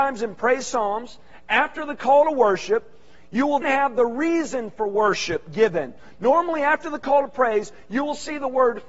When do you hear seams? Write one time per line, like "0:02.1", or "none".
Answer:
0:03.6